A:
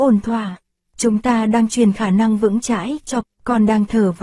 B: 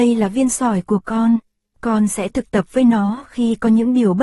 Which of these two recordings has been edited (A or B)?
A